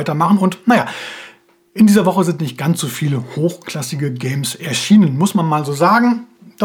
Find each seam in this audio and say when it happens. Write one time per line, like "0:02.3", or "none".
none